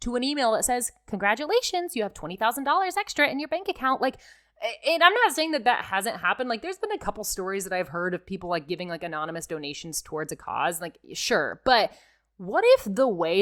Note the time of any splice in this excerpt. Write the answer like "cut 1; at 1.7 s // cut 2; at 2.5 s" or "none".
none